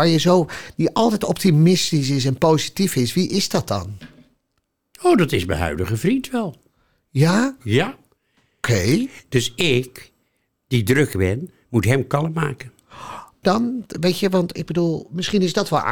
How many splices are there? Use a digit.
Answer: 2